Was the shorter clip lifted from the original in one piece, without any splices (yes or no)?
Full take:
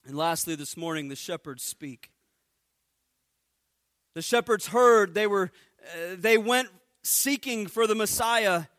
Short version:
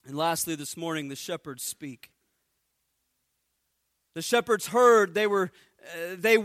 yes